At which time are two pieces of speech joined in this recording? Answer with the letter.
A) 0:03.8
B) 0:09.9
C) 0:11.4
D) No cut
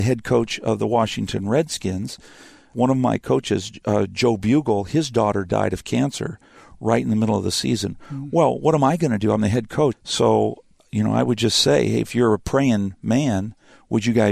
B